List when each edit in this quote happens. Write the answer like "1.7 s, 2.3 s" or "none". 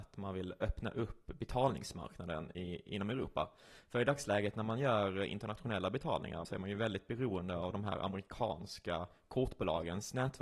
6.4 s

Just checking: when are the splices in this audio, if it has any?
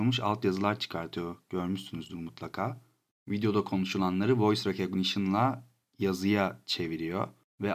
none

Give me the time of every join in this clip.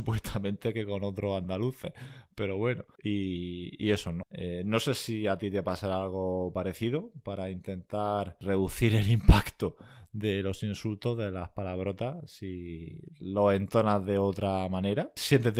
4.2 s

